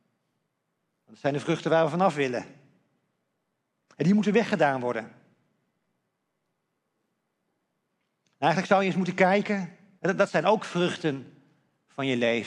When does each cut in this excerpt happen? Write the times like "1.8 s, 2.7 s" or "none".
10.0 s